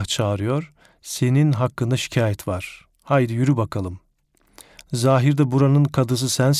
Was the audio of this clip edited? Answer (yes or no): no